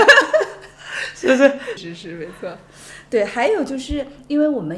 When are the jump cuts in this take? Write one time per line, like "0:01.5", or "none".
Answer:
0:01.8